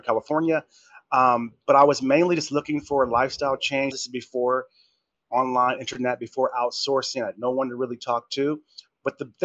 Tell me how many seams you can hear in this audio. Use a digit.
1